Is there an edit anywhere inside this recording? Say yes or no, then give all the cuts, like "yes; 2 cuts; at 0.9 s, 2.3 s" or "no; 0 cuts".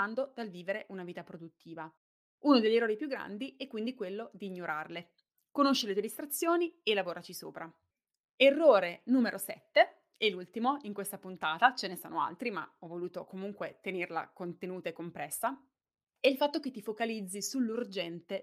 no; 0 cuts